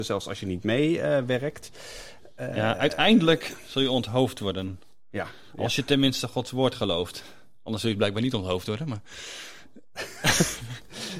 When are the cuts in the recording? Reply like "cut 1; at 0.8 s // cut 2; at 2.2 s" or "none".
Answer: none